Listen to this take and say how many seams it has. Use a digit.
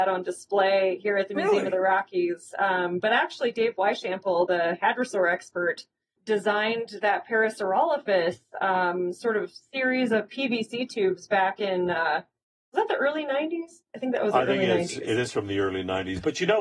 1